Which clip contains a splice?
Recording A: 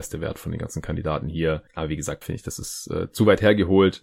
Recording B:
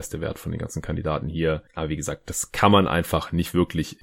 A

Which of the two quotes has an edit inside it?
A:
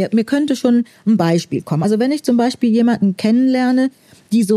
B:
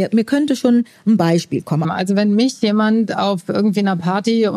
B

